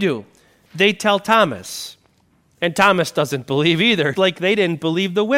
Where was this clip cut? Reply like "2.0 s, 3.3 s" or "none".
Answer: 4.1 s